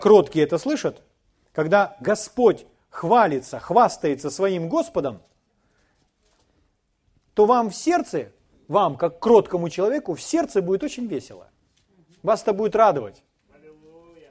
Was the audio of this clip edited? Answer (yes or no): no